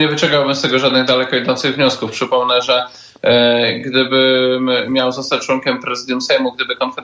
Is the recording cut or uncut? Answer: uncut